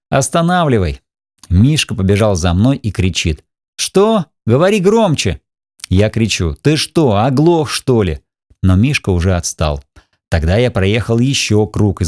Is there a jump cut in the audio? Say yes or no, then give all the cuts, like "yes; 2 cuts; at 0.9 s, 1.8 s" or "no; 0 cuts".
no; 0 cuts